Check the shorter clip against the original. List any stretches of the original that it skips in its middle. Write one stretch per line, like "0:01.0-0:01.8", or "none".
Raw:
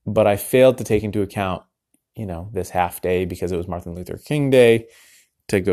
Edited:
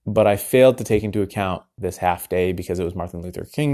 0:01.8-0:02.5